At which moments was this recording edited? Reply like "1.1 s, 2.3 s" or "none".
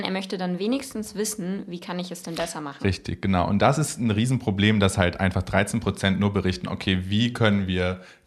none